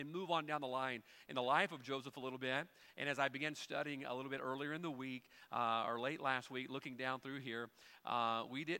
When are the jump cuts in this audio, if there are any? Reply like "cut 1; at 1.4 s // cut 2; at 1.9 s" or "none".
none